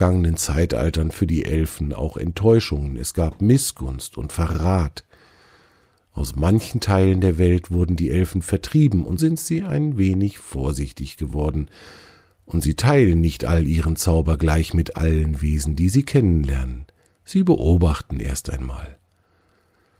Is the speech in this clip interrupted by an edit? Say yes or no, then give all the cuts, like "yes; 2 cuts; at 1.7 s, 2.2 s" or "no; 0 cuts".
yes; 1 cut; at 9.2 s